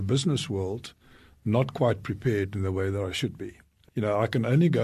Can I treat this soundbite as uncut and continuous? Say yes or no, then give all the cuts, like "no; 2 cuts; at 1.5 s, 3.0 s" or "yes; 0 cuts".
yes; 0 cuts